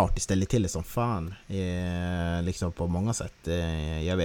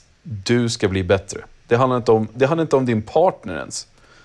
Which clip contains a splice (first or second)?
second